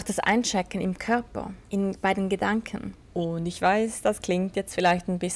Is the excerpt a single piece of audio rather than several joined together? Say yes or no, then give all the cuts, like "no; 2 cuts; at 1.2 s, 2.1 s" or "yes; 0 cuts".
no; 2 cuts; at 1.6 s, 3.1 s